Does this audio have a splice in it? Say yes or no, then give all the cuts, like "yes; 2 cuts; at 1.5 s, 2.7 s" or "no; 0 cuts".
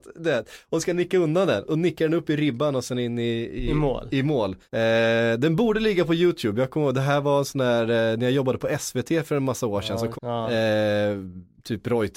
yes; 3 cuts; at 1.6 s, 4.7 s, 10.1 s